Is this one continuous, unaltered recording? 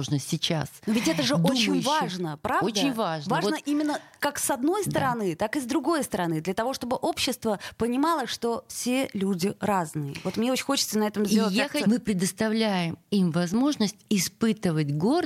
no; 1 cut; at 11.8 s

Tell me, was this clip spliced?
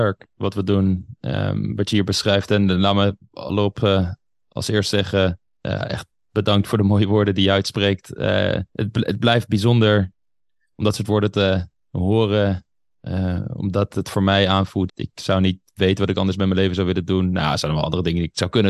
yes; 2 cuts; at 8.7 s, 14.9 s

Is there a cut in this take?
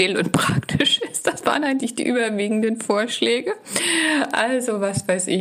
no; 0 cuts

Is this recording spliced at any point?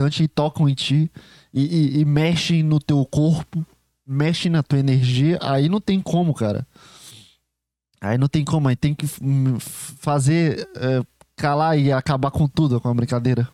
no; 0 cuts

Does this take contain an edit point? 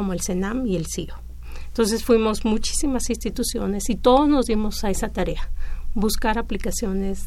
no; 0 cuts

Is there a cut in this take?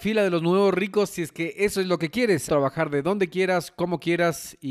yes; 1 cut; at 2.5 s

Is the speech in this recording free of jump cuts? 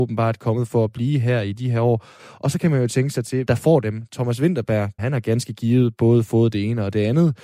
no; 2 cuts; at 3.5 s, 5.0 s

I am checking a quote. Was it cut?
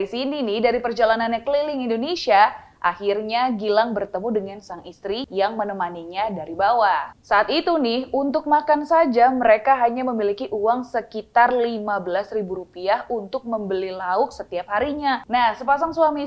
yes; 2 cuts; at 5.3 s, 15.2 s

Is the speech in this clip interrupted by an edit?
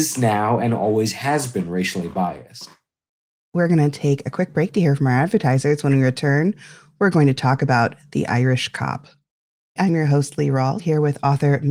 yes; 2 cuts; at 9.8 s, 10.8 s

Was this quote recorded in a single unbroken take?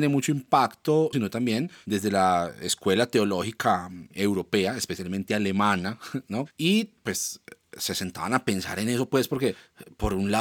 no; 2 cuts; at 1.1 s, 6.5 s

